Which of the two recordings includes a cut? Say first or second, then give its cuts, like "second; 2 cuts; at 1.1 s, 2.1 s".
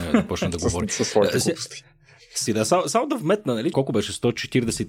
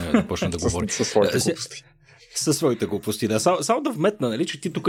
first; 2 cuts; at 2.5 s, 3.7 s